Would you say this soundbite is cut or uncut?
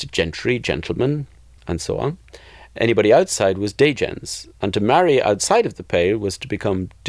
uncut